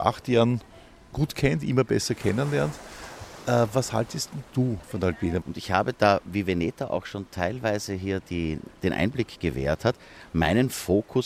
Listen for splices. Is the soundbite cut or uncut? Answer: cut